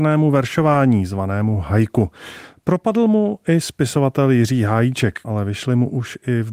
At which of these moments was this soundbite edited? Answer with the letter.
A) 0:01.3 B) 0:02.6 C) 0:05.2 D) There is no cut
C